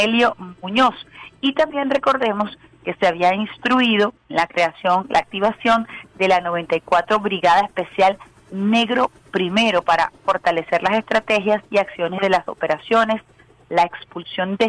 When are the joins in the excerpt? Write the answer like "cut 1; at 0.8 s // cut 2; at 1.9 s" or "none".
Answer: cut 1; at 4.2 s // cut 2; at 11.7 s